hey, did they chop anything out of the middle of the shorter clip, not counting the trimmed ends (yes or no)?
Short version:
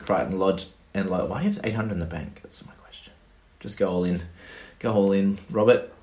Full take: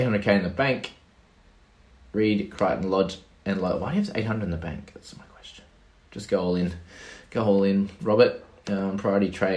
no